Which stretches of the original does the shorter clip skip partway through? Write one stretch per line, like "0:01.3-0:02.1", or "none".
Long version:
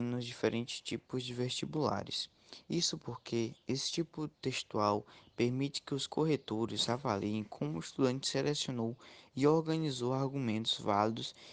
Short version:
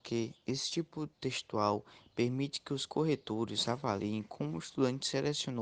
none